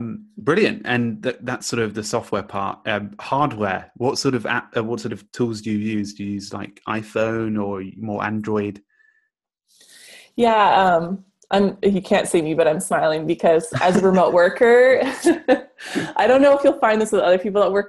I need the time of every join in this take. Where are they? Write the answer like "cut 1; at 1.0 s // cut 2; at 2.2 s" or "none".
none

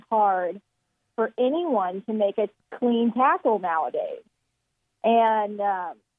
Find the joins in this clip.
none

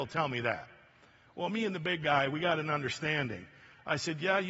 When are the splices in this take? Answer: none

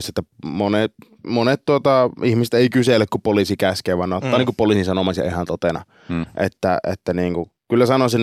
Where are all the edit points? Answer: none

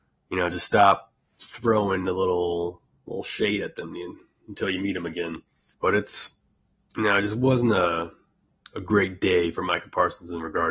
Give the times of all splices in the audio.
cut 1; at 5.7 s

